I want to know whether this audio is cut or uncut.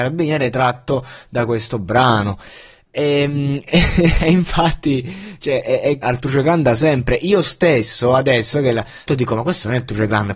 cut